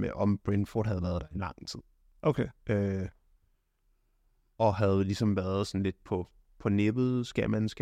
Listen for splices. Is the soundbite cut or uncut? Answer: uncut